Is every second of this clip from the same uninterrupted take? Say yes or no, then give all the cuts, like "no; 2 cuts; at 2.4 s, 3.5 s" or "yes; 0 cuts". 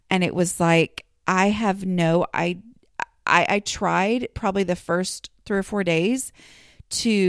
yes; 0 cuts